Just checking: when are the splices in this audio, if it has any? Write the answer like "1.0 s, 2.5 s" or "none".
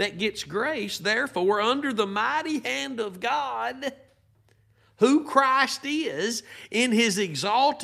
none